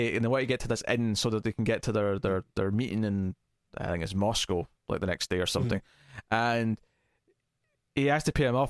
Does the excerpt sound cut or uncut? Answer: uncut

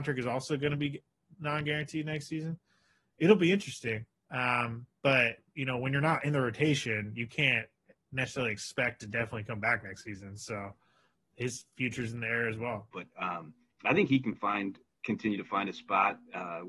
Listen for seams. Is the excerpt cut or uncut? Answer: cut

